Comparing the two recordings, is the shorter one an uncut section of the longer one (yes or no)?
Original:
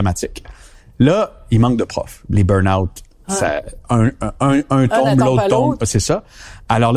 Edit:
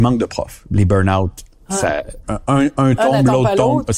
no